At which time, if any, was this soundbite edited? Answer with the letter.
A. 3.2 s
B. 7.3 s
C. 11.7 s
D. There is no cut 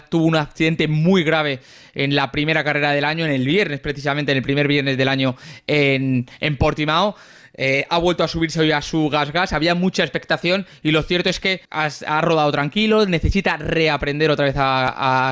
C